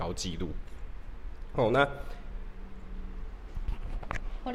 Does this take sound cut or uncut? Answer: uncut